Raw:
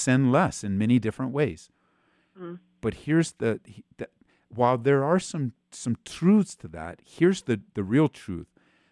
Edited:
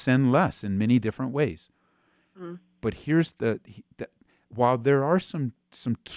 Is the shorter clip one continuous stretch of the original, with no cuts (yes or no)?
yes